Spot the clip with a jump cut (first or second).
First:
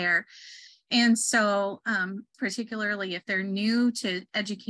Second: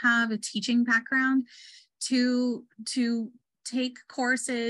first